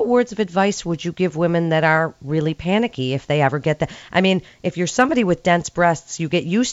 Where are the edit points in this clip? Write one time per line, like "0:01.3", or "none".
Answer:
none